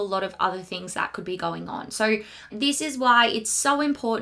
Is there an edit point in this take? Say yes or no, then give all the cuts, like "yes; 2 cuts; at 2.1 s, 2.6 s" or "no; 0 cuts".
yes; 1 cut; at 2.5 s